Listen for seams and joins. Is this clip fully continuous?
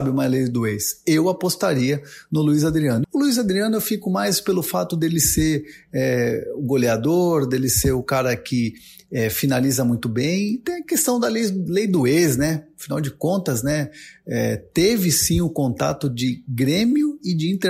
no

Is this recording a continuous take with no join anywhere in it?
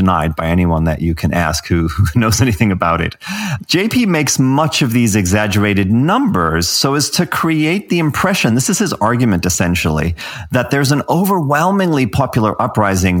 yes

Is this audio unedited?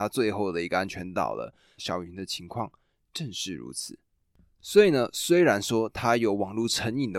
no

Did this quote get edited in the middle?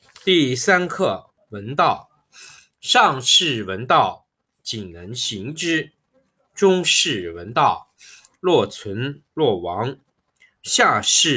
no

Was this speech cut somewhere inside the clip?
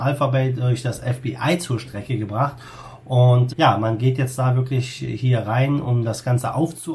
yes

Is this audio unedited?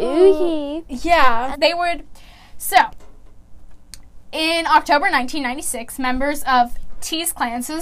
no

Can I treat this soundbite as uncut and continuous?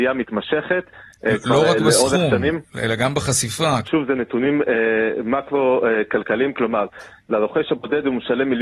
no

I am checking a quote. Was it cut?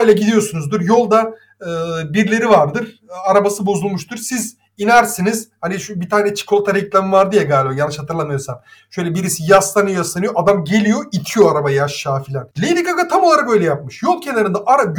no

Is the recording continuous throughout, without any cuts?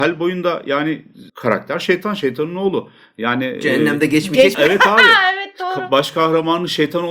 no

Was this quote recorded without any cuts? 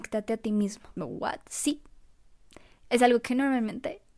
no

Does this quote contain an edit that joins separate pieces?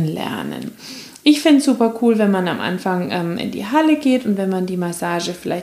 no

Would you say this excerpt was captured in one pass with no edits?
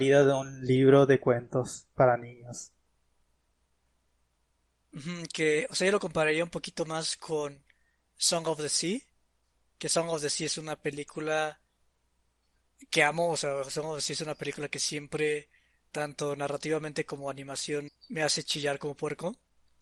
no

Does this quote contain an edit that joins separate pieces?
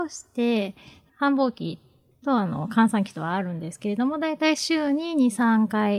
no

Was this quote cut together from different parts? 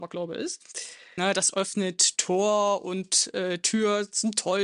yes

